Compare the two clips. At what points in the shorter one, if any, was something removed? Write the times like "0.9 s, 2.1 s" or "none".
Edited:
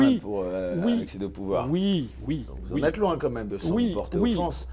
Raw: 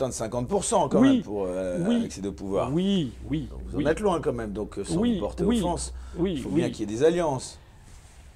3.5 s